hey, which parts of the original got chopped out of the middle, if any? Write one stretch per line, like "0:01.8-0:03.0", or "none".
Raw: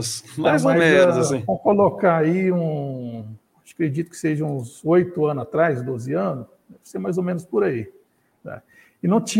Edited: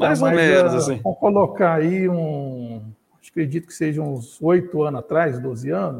none